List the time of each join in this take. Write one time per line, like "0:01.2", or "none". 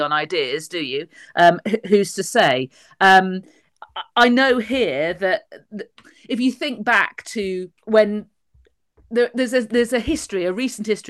0:07.8